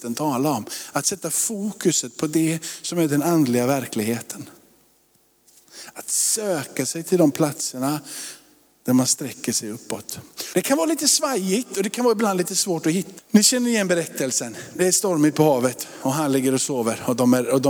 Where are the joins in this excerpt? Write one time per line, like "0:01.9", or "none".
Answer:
0:10.5
0:13.2